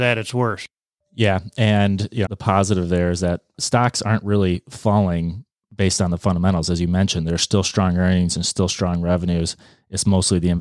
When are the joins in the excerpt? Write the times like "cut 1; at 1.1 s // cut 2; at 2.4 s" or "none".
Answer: cut 1; at 2.3 s